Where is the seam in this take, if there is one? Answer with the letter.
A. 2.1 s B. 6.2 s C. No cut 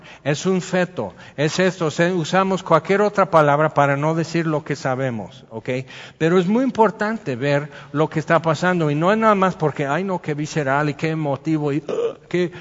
C